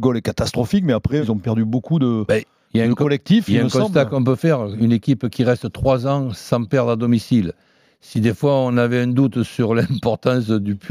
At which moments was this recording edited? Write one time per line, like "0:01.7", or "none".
0:01.2